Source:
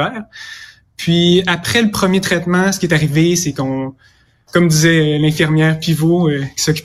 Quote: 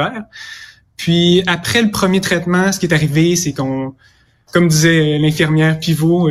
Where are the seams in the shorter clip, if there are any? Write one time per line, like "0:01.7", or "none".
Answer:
none